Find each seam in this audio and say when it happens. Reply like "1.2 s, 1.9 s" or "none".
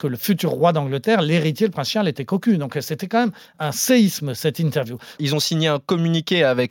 5.2 s